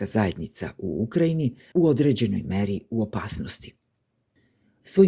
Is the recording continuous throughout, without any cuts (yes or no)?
no